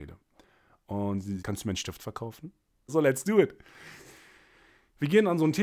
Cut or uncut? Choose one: cut